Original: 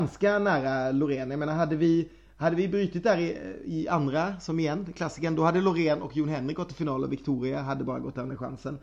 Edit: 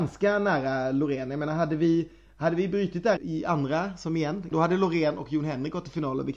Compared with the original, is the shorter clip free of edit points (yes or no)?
no